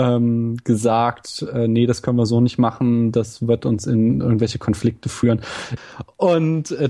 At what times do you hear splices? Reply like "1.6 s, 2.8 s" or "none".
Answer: 5.8 s